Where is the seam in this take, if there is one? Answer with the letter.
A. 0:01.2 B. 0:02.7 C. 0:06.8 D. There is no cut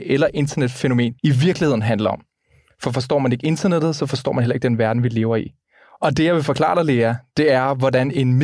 A